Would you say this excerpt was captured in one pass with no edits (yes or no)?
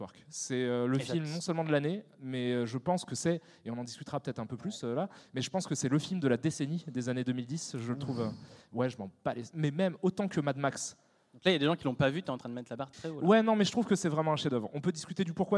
no